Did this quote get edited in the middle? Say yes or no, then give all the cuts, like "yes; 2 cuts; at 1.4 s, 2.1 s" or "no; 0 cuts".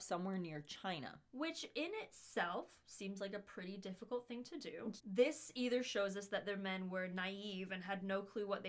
yes; 1 cut; at 5.0 s